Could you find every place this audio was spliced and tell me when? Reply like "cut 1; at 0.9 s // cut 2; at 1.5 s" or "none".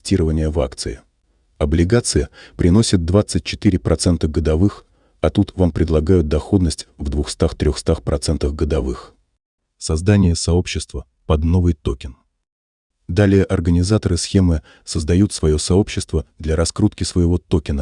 none

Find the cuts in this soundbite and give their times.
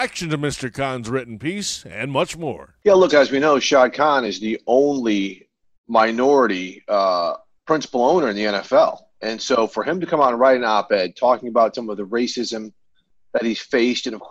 cut 1; at 3.1 s

